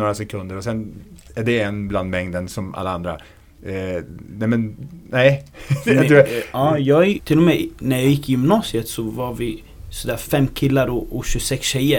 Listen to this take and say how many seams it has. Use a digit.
1